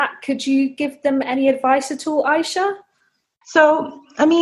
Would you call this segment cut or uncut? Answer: cut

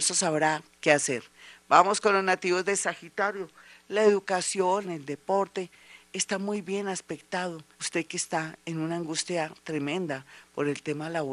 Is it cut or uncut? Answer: cut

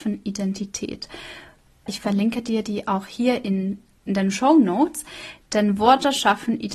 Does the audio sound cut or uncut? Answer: cut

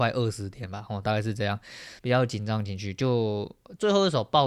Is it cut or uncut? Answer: cut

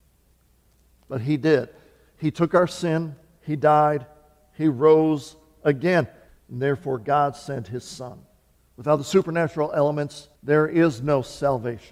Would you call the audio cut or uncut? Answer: cut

